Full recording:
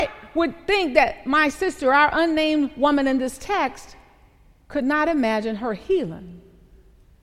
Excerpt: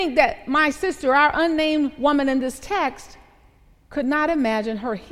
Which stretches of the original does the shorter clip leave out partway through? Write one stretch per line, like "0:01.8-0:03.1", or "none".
none